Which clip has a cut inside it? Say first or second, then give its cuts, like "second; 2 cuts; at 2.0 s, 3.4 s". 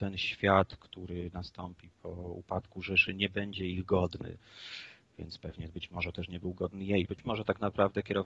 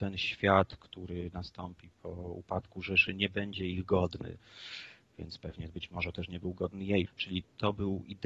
second; 1 cut; at 7.1 s